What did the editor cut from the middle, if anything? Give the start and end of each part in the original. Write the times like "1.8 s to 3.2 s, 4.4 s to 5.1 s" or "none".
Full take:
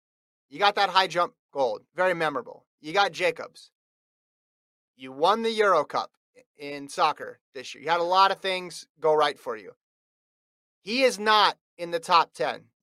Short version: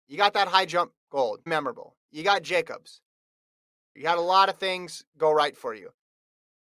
1.9 s to 2.2 s, 4.6 s to 7.8 s